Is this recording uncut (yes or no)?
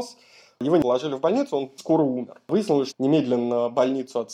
no